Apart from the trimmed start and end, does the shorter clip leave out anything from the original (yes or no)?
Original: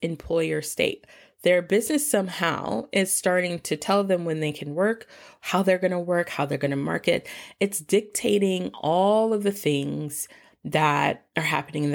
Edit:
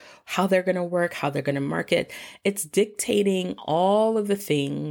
no